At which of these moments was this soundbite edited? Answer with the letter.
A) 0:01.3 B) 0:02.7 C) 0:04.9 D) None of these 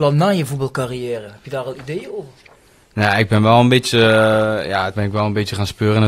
C